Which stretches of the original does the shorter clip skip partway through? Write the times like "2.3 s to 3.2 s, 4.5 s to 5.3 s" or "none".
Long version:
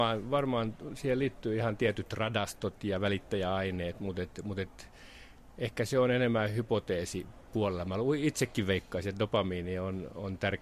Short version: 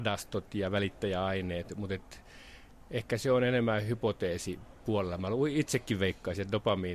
4.0 s to 4.4 s